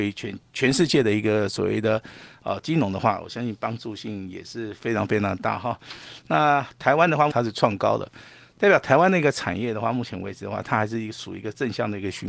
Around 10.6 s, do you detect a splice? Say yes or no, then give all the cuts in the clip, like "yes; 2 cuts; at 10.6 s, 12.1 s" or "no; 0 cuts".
no; 1 cut; at 7.3 s